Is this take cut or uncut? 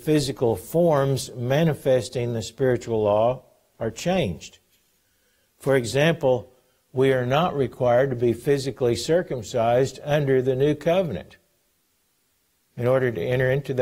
uncut